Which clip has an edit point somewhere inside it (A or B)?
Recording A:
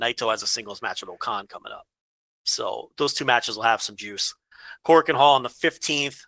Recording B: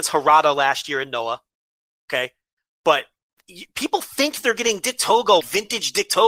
B